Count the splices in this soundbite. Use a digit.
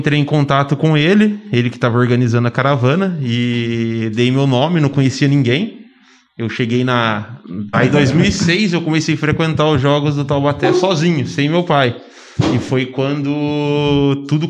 1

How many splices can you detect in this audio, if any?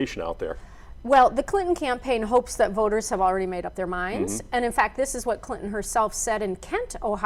0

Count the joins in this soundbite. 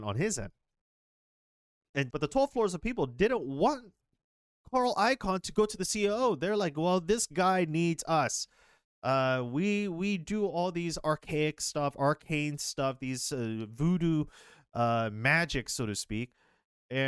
1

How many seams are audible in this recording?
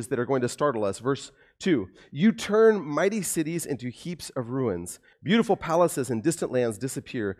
1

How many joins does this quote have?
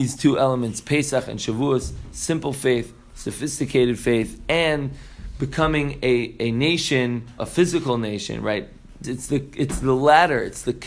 2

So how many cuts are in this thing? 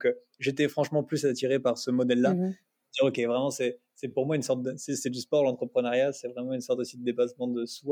0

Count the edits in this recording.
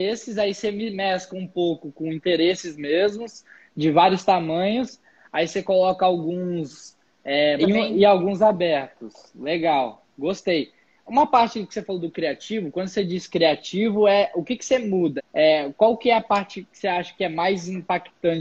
2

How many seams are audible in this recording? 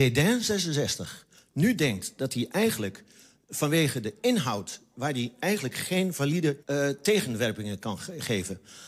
1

